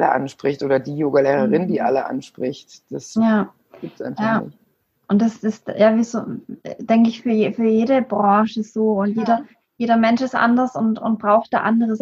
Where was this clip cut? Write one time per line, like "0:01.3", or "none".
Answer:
none